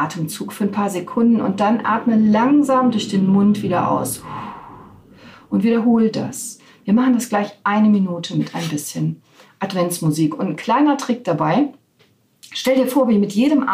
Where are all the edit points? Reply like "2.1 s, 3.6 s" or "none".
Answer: none